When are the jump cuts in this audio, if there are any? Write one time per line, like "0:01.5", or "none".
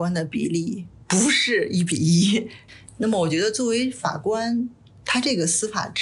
none